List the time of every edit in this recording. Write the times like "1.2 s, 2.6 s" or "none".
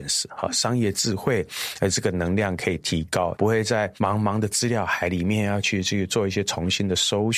3.4 s

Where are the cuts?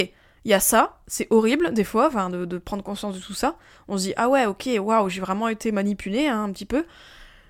none

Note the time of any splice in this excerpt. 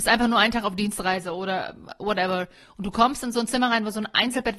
none

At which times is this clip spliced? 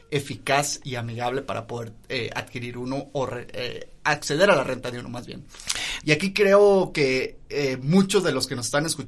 6.0 s

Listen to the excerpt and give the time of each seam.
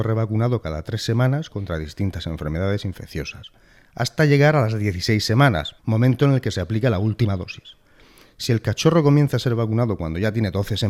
5.8 s

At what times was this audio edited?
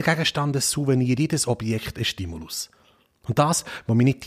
none

